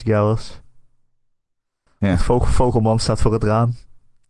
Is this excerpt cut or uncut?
uncut